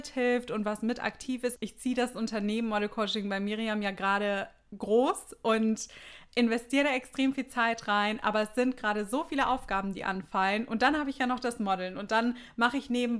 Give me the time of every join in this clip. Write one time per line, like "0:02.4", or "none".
0:01.5